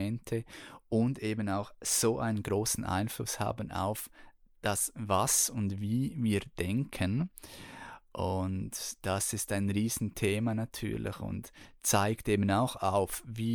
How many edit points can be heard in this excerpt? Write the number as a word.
zero